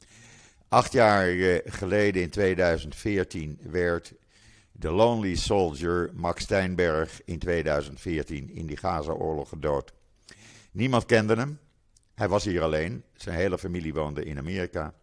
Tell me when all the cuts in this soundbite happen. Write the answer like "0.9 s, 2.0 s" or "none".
none